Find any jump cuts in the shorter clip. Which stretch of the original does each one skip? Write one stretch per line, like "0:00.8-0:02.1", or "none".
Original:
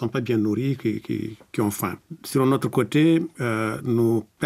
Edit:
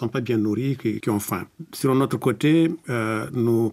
0:01.0-0:01.5